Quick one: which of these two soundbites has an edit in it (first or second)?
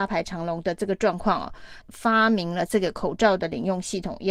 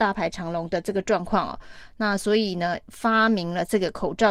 first